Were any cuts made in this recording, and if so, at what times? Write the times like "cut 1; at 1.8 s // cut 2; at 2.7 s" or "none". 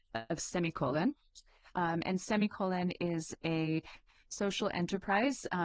none